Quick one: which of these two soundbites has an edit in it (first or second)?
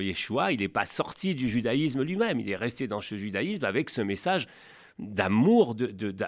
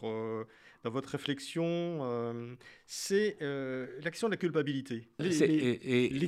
second